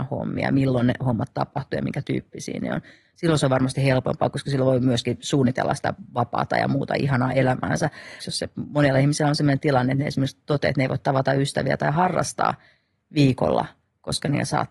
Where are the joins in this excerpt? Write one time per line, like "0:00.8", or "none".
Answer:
0:08.2